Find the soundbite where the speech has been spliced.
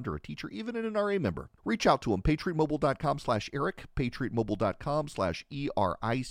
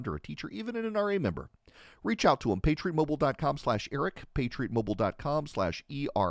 first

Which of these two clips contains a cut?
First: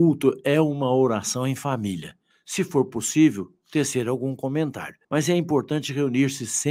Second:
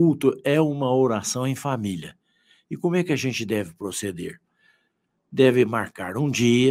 first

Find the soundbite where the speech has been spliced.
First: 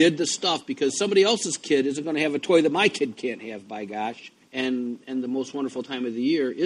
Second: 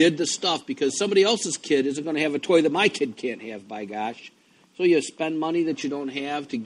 first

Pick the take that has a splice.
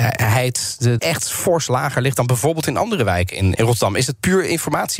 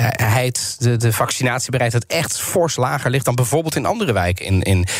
first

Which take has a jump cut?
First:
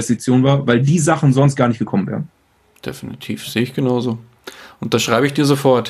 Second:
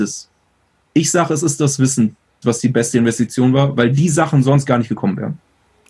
second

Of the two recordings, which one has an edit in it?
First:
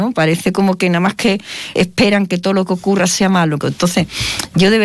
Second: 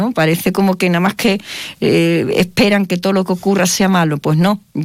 first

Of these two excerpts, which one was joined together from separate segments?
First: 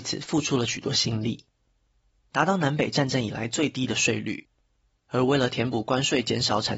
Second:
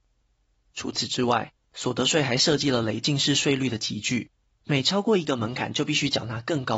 first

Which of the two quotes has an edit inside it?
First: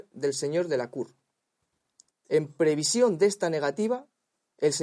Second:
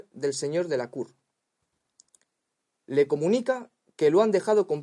first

